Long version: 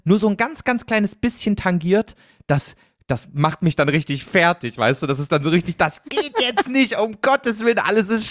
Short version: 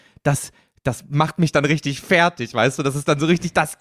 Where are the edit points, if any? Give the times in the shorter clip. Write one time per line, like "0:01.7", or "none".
none